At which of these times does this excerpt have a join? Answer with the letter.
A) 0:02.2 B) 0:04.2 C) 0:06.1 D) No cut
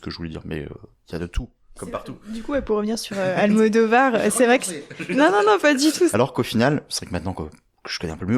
C